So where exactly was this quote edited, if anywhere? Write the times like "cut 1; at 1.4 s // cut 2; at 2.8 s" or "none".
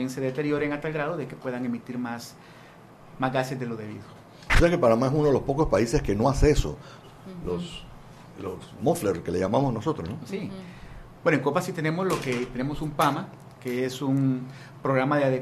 cut 1; at 7.0 s